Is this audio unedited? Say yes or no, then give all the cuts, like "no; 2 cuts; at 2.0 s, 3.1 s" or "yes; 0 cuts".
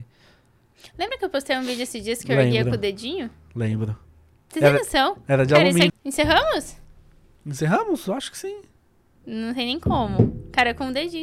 no; 2 cuts; at 5.9 s, 9.2 s